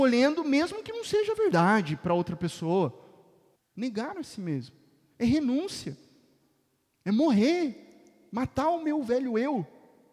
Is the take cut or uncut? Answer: cut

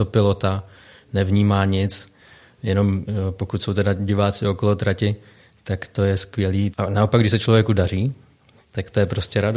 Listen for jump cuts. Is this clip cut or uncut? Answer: cut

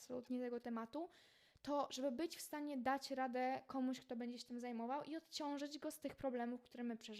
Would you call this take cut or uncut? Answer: uncut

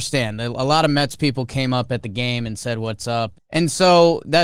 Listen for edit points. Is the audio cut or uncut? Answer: cut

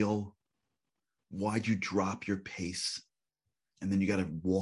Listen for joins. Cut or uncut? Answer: uncut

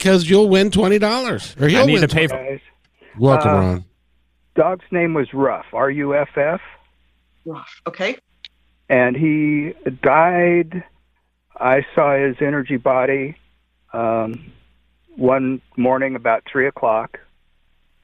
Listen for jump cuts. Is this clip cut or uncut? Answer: cut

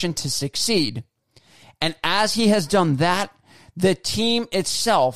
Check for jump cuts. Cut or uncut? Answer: uncut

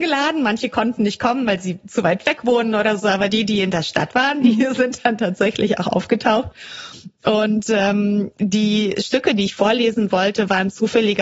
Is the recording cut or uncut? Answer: uncut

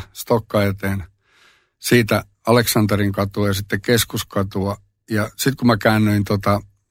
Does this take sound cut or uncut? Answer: uncut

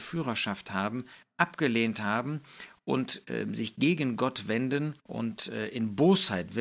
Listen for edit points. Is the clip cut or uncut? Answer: cut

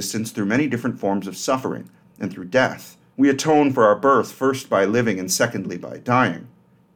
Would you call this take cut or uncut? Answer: cut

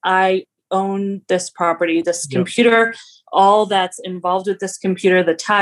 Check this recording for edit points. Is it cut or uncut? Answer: uncut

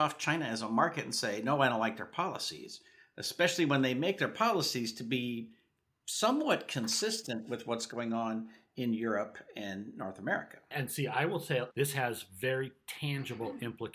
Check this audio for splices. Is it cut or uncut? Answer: cut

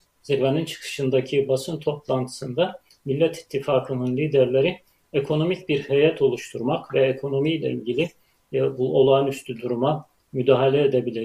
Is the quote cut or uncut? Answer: uncut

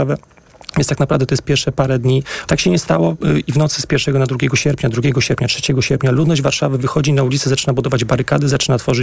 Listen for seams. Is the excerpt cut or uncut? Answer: cut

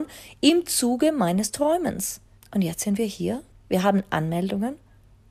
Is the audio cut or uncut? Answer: cut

